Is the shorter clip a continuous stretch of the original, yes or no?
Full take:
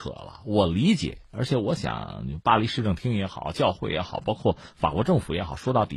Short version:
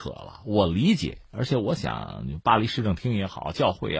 yes